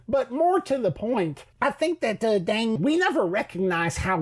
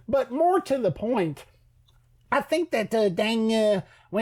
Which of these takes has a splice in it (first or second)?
first